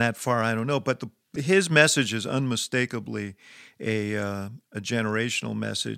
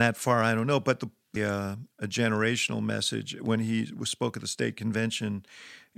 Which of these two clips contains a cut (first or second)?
second